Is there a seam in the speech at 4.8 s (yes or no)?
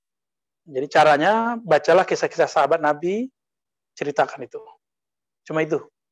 no